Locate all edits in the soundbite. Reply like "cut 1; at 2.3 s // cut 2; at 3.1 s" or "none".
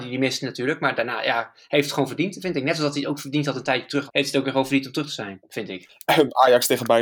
cut 1; at 4.1 s // cut 2; at 5.9 s